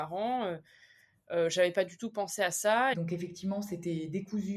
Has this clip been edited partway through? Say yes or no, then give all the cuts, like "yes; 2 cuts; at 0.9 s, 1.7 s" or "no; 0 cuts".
yes; 1 cut; at 2.9 s